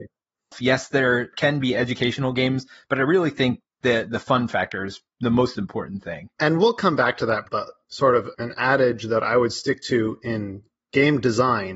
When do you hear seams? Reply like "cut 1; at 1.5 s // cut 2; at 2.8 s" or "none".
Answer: cut 1; at 6.3 s // cut 2; at 7.4 s